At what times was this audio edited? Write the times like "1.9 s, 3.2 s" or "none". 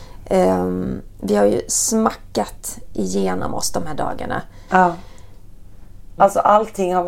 4.7 s, 6.2 s